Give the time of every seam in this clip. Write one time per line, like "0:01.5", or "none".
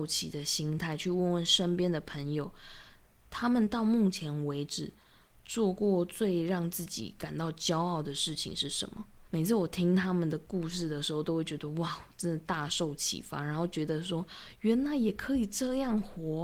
0:09.3